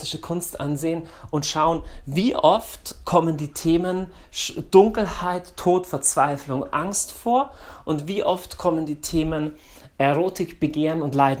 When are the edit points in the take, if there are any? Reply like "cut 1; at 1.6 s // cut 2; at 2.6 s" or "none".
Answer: cut 1; at 9.9 s